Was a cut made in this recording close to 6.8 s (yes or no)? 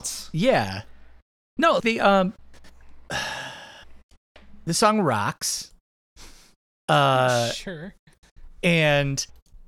no